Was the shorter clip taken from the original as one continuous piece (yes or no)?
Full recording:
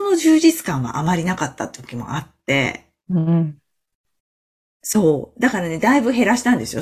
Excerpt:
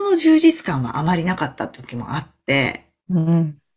yes